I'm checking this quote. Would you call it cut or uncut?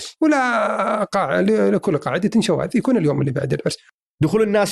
uncut